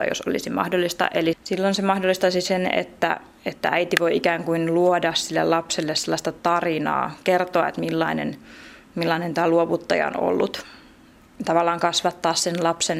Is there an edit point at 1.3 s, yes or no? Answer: yes